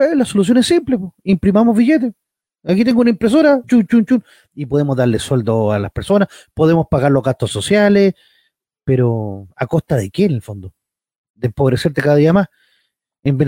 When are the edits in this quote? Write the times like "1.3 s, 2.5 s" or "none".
3.6 s